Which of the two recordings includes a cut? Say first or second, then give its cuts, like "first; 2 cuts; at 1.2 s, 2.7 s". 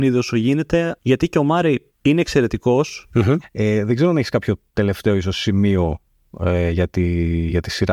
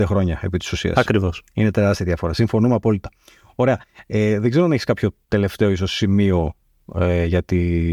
first; 2 cuts; at 1.0 s, 3.4 s